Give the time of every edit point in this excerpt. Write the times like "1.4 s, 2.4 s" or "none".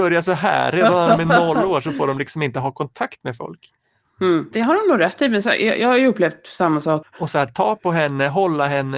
4.5 s, 7.0 s